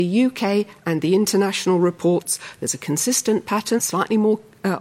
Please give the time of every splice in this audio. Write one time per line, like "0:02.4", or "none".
0:03.8